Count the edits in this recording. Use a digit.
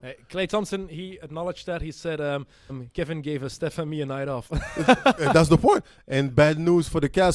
1